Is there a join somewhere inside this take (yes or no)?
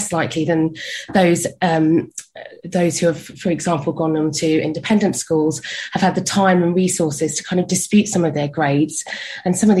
yes